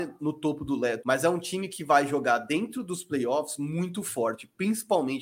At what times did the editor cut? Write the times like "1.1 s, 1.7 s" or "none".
1.0 s

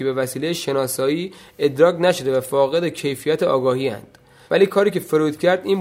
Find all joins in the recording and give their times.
4.5 s

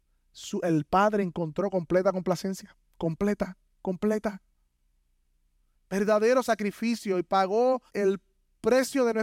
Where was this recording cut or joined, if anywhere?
5.7 s, 7.9 s

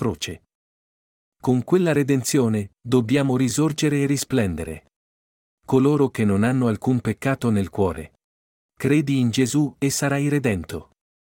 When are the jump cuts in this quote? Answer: 5.5 s, 8.7 s

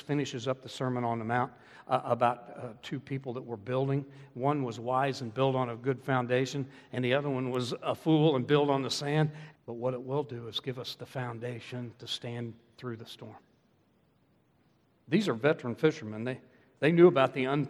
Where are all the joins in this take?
9.5 s

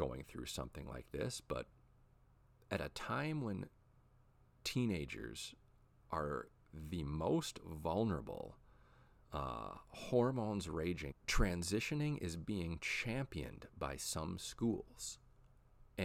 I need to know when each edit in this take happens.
11.1 s

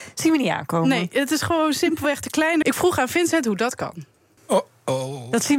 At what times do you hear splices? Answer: 2.6 s, 4.4 s

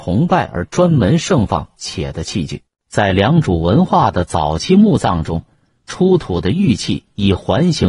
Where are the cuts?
2.8 s

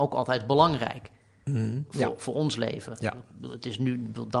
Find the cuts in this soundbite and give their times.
none

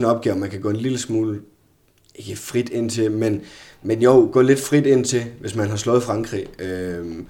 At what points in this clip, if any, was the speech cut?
none

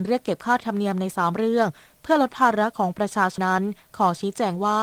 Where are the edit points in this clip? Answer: 3.4 s

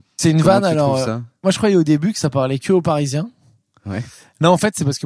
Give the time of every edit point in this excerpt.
none

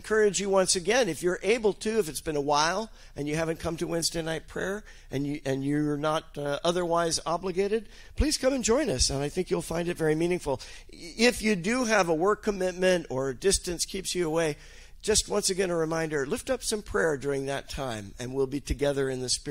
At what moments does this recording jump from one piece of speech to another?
none

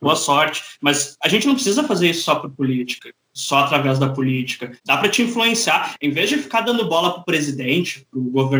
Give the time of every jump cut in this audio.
6.0 s

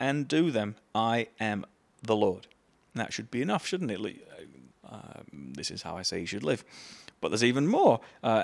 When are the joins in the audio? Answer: 4.7 s

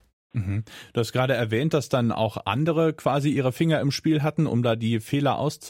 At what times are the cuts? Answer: none

